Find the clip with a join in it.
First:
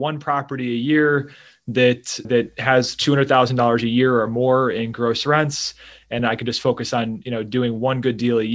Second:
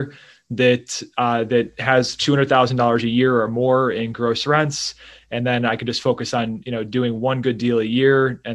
first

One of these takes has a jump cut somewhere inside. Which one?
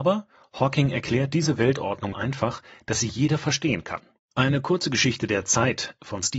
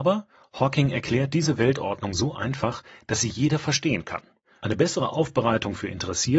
first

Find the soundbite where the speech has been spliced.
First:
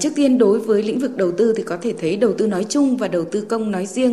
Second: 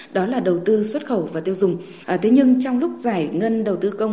second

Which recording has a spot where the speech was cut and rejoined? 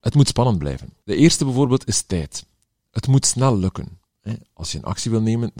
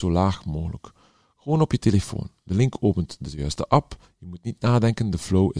first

